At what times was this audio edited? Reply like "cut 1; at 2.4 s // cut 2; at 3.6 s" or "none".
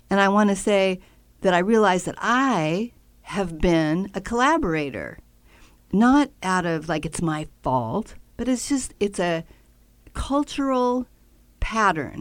cut 1; at 8.3 s